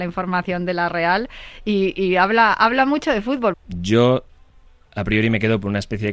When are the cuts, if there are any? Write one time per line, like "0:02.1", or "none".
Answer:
0:03.5